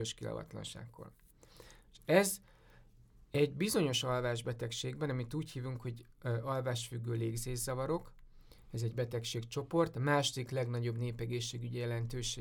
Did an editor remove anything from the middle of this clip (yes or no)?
no